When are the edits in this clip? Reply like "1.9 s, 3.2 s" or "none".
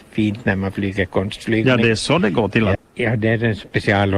2.7 s